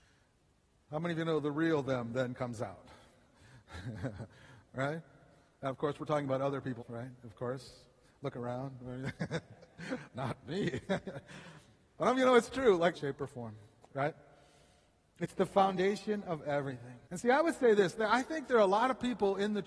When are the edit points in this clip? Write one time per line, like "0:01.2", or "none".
0:06.8
0:12.9
0:17.0

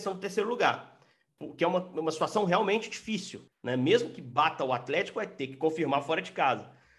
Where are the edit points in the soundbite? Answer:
0:03.5

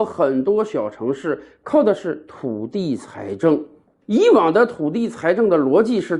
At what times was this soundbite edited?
0:03.9

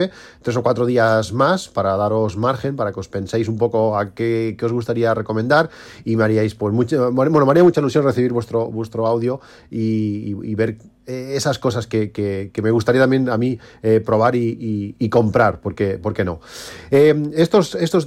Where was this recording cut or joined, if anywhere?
0:15.0

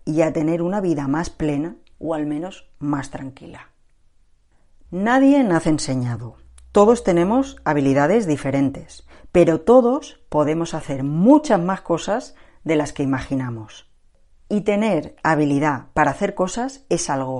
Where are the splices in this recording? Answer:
0:04.9

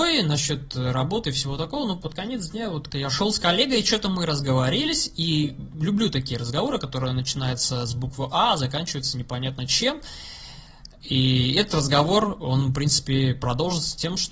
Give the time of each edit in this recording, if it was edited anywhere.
0:02.9

